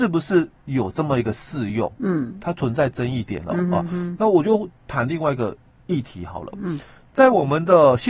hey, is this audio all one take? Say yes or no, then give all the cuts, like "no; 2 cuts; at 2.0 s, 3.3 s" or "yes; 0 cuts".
yes; 0 cuts